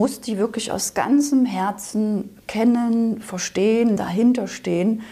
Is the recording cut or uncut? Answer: cut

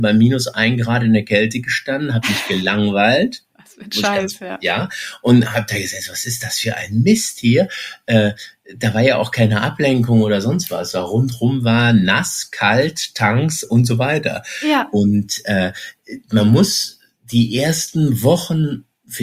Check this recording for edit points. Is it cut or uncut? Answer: uncut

